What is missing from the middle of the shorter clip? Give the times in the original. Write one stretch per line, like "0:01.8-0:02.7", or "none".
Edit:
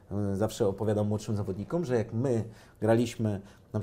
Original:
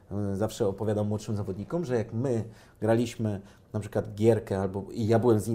none